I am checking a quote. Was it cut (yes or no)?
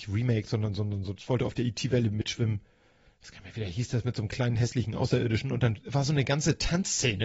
no